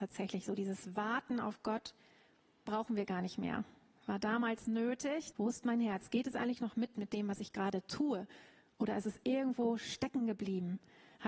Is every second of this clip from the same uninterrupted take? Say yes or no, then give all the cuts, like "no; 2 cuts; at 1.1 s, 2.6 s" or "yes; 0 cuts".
no; 2 cuts; at 2.7 s, 5.3 s